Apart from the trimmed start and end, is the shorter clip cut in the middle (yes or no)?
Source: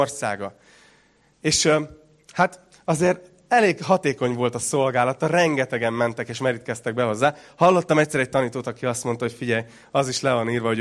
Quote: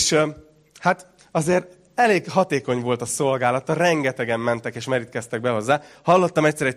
no